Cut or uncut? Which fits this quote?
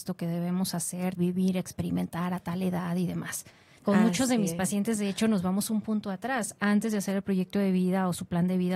cut